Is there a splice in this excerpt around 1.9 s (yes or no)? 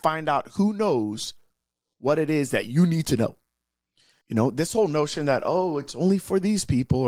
no